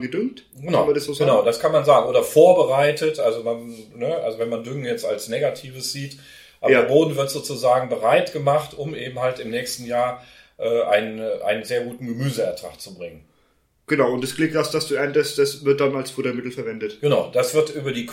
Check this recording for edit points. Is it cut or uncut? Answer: uncut